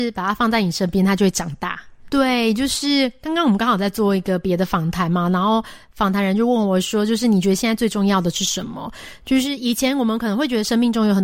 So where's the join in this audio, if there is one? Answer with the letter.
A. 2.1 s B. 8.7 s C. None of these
A